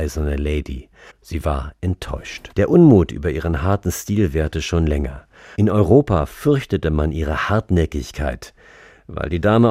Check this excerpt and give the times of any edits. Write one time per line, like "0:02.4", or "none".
0:01.1
0:02.5
0:05.5